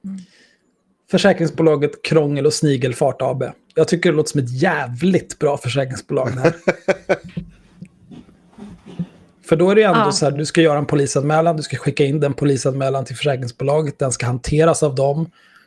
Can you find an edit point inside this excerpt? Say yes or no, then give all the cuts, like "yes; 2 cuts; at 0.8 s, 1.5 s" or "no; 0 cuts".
no; 0 cuts